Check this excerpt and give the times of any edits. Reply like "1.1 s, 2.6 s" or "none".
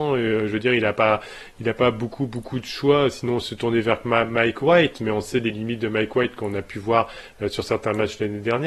none